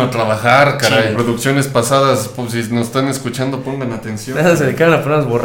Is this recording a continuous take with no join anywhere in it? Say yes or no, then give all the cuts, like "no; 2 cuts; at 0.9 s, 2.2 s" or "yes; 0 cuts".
no; 1 cut; at 1.1 s